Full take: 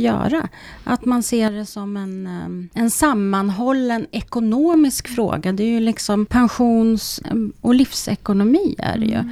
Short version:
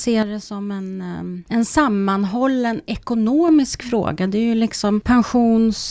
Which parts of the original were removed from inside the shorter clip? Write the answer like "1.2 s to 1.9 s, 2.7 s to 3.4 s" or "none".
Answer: none